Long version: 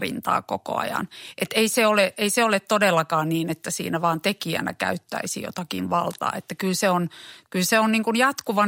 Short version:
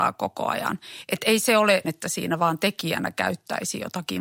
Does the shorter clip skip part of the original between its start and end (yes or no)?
yes